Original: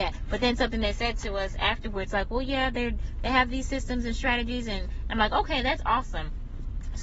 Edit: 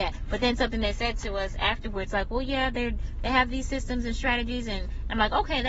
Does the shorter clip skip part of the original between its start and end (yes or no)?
no